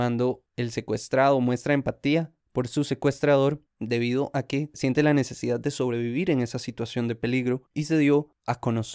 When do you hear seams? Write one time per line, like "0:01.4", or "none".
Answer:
0:04.7
0:07.7